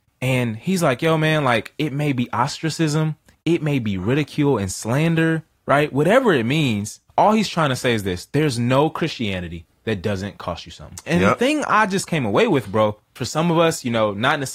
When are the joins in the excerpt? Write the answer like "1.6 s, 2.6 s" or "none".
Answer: 7.1 s, 11.1 s, 13.2 s